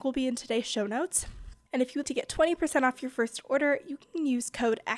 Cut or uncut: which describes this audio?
cut